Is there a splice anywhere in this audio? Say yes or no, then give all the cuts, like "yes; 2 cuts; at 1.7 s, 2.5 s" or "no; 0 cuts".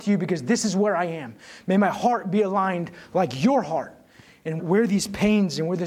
yes; 1 cut; at 4.6 s